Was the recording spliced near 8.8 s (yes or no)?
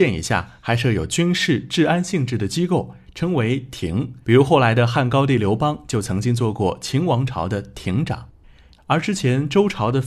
yes